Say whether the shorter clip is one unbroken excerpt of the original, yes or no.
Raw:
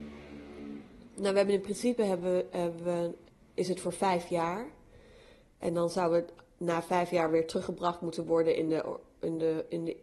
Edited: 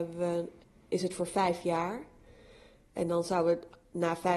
yes